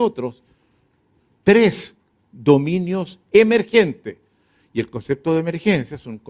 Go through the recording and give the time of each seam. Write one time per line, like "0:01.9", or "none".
none